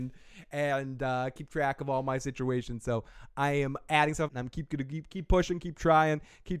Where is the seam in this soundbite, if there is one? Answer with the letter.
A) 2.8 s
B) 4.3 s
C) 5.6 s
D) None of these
B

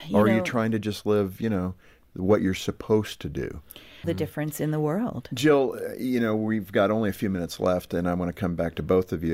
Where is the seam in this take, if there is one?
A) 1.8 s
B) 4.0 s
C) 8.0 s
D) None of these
B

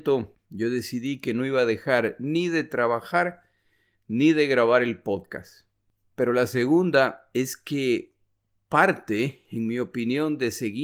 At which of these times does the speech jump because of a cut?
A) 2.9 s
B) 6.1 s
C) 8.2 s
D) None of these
B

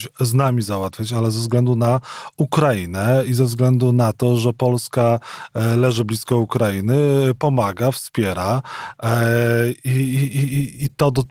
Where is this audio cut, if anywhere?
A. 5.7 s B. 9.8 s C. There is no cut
C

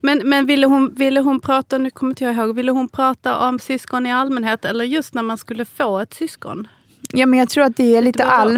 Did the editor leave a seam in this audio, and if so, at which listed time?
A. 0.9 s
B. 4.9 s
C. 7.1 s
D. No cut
D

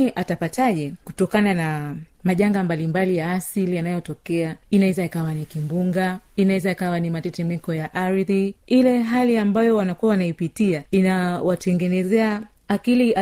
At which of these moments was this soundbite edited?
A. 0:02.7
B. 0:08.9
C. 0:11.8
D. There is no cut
D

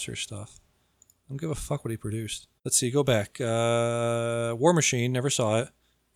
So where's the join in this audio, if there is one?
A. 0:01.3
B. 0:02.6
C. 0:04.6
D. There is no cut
B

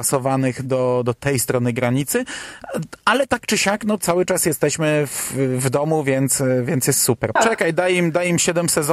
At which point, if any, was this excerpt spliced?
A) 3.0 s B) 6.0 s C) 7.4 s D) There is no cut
C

